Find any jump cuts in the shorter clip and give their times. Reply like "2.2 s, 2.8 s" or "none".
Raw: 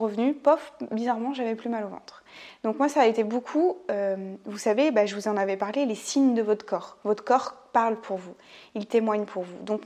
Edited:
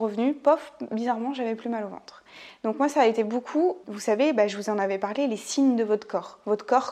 3.8 s